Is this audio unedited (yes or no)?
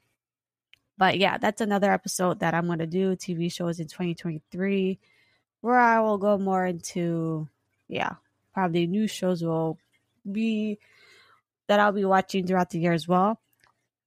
yes